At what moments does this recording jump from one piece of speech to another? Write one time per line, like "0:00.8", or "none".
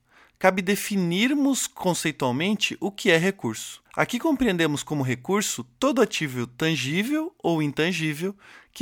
0:03.9